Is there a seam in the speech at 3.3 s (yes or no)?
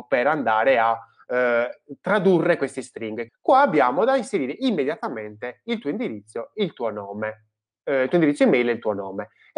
yes